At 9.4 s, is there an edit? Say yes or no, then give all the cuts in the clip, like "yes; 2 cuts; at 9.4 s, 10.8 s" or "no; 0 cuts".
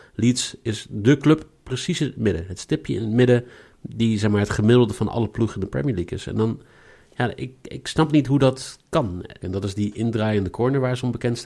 yes; 1 cut; at 9.4 s